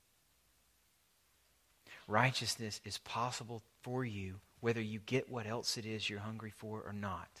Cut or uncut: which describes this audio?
uncut